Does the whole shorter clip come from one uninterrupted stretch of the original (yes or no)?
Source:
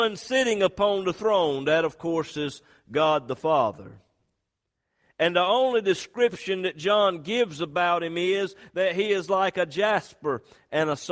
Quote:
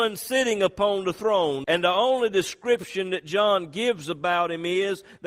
no